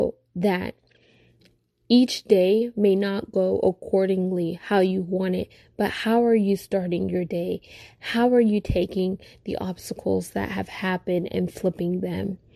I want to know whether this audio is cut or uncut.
uncut